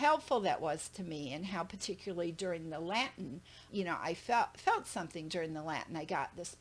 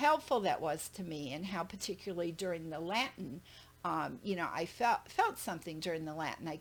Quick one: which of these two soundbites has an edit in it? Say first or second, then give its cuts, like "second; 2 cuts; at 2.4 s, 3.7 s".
first; 1 cut; at 3.7 s